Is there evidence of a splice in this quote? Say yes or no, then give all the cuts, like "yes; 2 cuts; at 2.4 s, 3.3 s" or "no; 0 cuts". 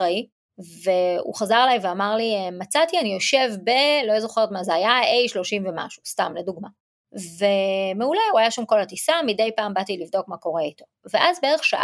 no; 0 cuts